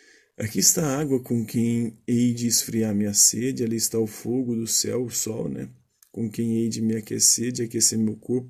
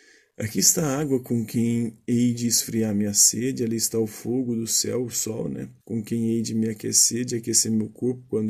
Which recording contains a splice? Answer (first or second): second